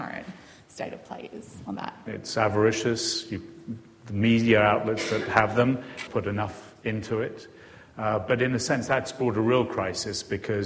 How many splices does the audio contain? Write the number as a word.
two